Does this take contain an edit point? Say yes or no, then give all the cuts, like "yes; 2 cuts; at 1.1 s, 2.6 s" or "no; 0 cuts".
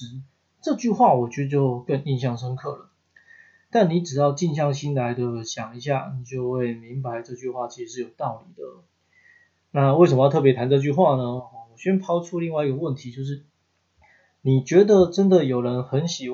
no; 0 cuts